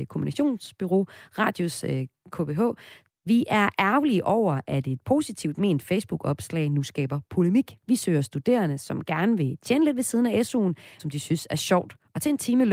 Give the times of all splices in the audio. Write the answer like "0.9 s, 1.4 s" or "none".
3.1 s, 7.8 s, 11.0 s

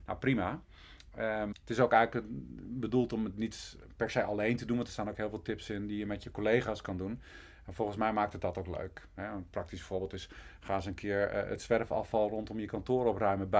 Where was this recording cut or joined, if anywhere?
1.5 s

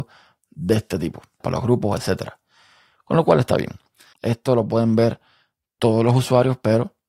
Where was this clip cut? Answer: 1.4 s, 4.1 s

